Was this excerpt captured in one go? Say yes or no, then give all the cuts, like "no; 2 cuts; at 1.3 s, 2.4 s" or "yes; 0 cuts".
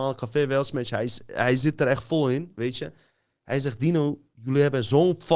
yes; 0 cuts